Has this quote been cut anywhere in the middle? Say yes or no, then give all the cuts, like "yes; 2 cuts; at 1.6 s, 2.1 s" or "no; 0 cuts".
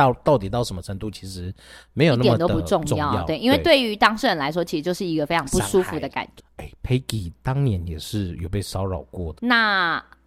yes; 2 cuts; at 6.4 s, 9.4 s